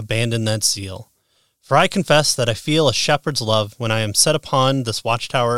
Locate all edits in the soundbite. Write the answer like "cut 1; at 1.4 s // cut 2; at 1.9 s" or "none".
cut 1; at 3.7 s